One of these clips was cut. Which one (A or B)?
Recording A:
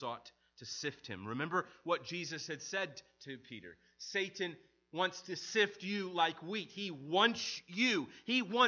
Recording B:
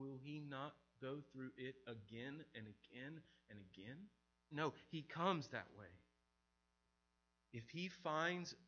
B